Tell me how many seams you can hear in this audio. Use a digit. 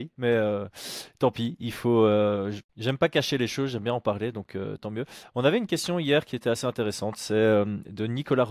1